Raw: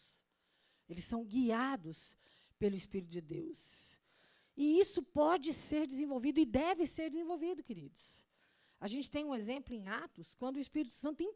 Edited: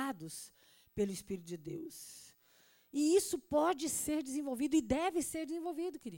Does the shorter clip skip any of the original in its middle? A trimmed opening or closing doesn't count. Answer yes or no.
no